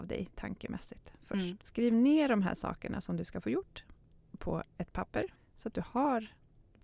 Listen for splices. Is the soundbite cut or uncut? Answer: cut